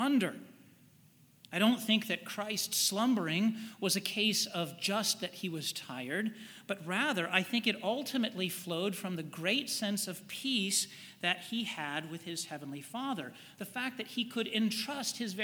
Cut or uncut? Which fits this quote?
cut